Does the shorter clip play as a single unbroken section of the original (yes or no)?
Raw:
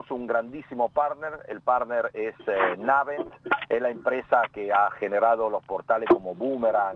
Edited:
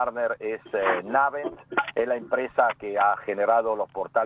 yes